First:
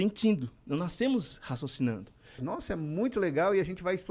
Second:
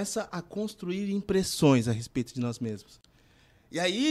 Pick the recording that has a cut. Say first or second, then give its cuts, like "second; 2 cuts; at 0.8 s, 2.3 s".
first; 1 cut; at 2.4 s